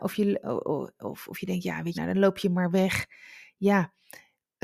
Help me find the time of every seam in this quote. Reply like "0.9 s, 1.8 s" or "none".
1.9 s